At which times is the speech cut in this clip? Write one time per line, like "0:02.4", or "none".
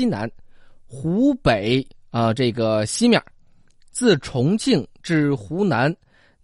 none

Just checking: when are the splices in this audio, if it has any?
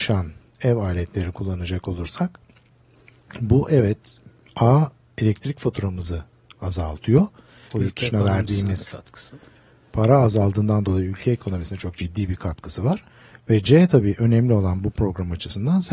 0:07.7

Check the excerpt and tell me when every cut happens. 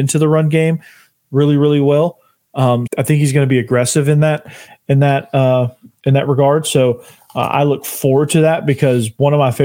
0:02.9

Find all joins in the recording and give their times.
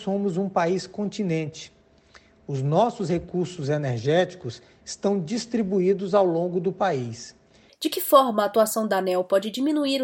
0:07.7

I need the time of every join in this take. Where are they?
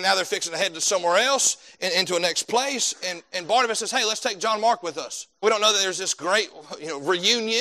0:05.4

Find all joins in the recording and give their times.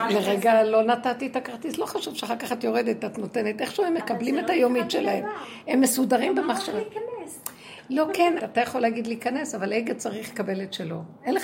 0:08.4

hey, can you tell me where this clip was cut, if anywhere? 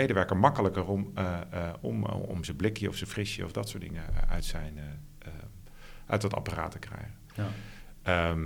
none

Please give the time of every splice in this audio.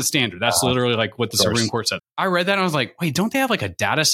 0:02.0

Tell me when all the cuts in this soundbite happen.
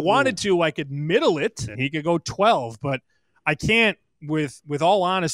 0:01.7

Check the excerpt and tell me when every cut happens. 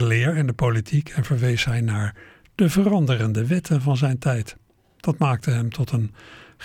none

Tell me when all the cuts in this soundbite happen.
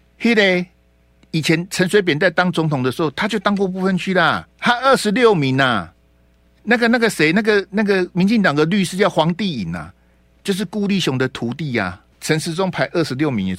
0:04.5
0:12.1

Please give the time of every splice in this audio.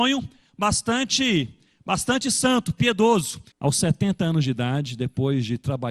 0:03.5

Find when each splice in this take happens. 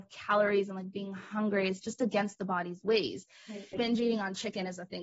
0:03.7

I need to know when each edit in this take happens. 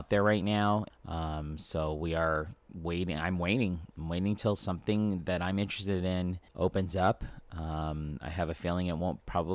0:00.9
0:06.5

